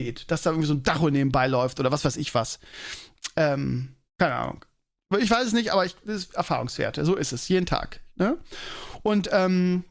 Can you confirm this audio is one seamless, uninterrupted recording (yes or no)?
no